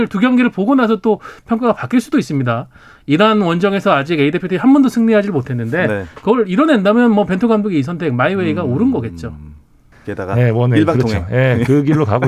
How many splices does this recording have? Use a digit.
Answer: 1